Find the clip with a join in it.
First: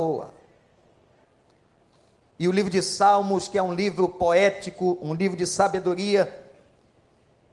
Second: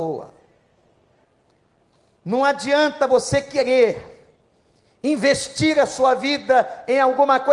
first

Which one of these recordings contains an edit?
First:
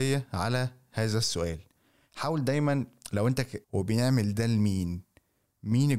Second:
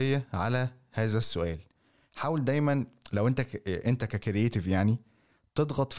first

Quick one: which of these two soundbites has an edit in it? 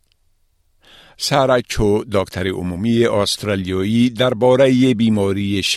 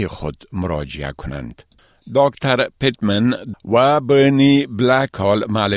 second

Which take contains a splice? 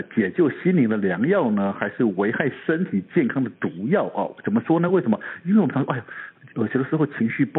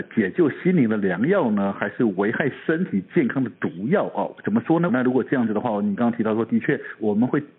second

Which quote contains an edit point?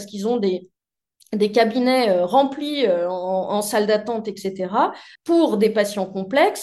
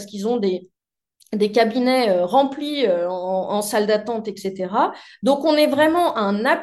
first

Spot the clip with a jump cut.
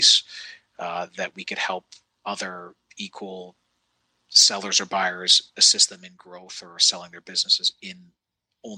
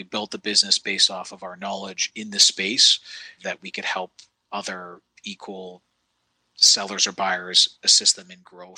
second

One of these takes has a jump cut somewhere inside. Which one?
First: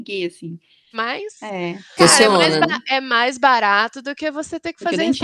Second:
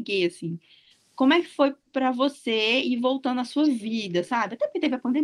first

